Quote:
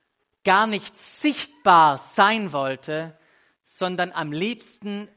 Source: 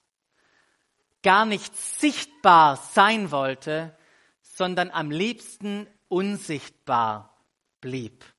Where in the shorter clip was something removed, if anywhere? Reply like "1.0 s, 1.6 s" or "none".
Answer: none